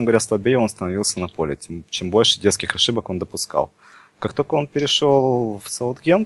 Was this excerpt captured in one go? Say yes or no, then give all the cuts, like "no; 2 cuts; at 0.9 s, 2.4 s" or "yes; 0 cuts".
yes; 0 cuts